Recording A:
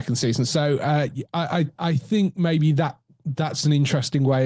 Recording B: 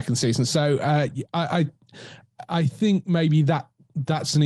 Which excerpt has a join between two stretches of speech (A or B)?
A